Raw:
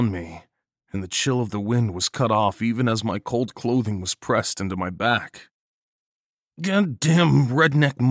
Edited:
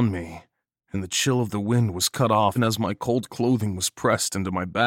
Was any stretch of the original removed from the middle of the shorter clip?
yes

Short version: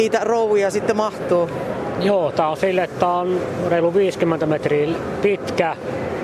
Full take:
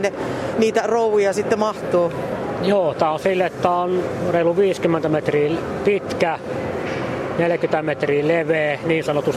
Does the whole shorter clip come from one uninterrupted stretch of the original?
yes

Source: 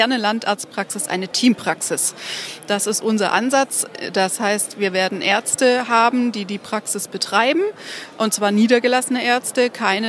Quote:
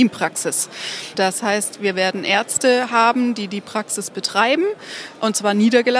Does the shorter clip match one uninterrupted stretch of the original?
no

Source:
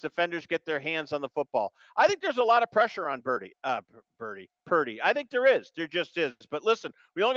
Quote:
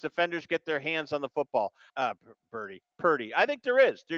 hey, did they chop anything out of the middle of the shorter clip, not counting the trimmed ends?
yes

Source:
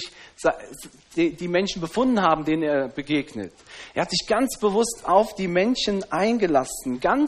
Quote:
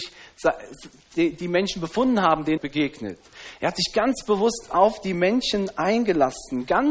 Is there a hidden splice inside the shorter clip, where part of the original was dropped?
yes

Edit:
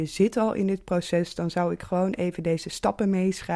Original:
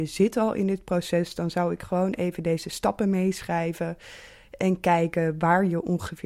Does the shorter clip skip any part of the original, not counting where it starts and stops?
no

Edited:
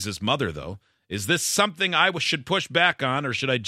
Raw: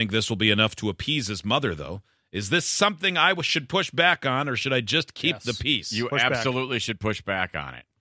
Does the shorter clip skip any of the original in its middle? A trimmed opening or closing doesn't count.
no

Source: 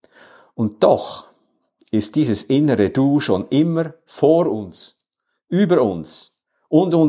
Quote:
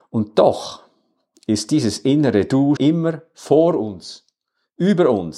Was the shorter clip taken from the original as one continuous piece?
no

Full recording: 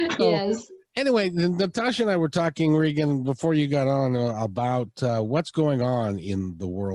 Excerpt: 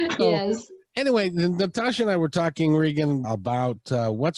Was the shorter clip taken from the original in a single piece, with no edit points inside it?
no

